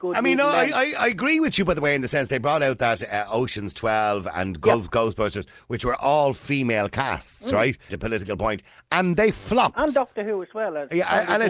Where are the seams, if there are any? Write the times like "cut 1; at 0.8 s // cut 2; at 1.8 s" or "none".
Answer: cut 1; at 7.9 s